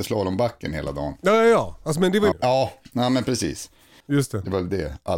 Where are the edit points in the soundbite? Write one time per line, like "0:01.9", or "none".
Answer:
0:02.3
0:04.0